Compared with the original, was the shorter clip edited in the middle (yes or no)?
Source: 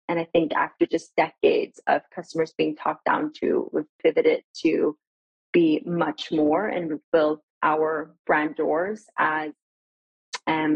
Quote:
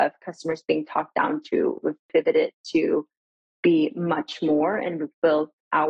no